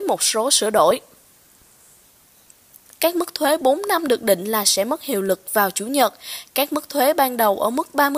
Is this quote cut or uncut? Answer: cut